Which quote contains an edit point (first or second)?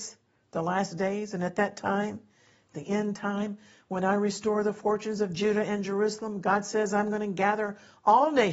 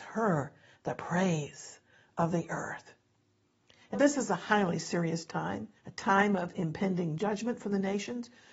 second